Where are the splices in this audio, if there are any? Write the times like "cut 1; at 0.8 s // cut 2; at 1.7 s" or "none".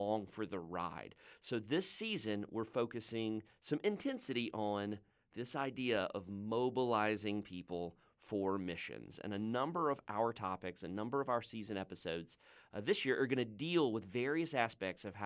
none